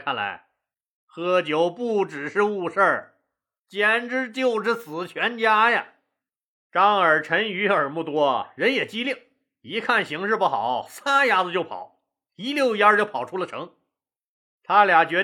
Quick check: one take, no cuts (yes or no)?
yes